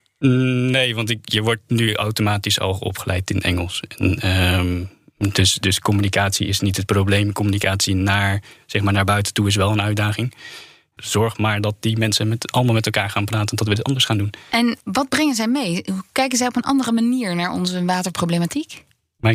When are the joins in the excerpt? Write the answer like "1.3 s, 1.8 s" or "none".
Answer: 11.0 s, 14.8 s